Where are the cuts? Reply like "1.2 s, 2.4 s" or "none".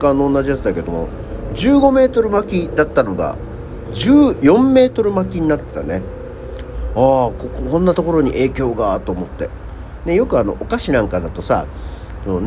none

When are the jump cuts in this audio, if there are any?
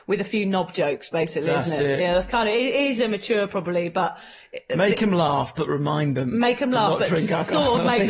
none

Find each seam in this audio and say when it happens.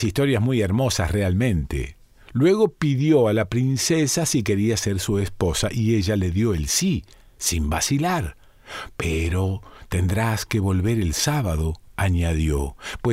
none

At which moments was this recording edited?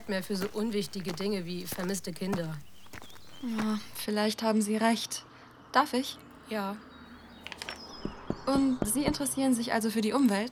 none

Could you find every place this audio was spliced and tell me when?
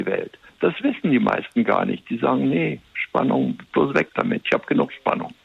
none

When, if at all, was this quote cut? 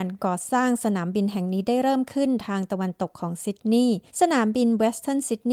4.1 s

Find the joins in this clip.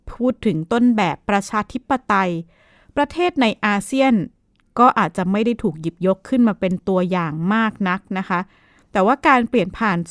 none

